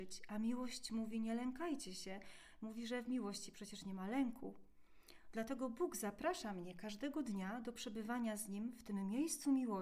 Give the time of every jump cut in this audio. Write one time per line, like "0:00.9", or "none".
none